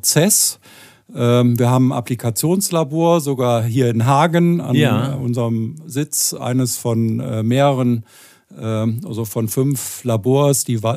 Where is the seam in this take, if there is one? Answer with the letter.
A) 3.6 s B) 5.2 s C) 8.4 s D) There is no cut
D